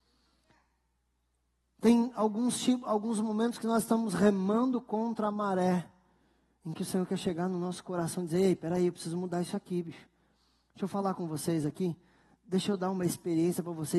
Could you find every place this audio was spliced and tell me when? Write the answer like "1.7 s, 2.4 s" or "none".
none

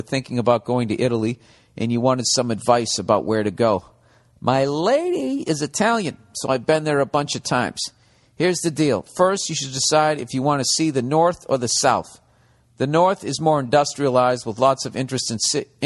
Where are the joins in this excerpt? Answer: none

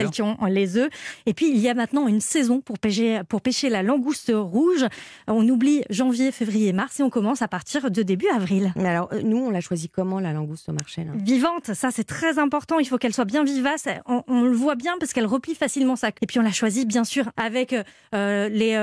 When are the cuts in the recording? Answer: 16.2 s, 17.3 s

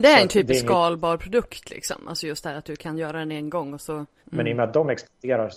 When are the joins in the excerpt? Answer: 4.2 s

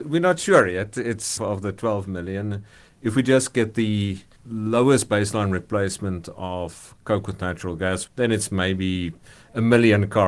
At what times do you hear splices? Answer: 1.4 s

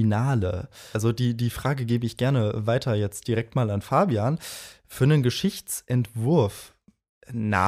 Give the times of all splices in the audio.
0.9 s

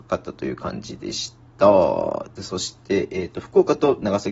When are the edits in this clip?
none

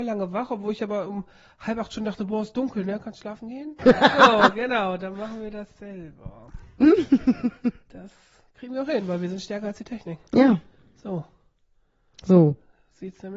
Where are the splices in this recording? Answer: 3.8 s

